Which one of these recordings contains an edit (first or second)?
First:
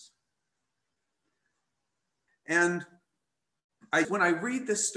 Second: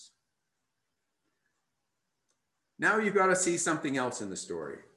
first